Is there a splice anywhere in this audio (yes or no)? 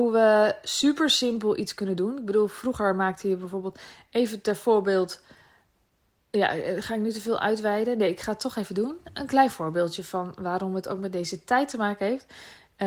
no